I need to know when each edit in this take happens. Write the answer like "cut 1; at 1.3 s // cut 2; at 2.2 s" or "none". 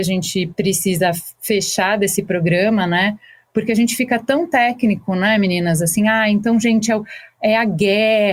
none